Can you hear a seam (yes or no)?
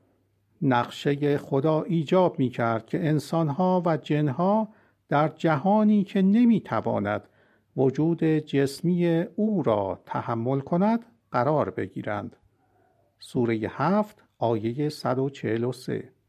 no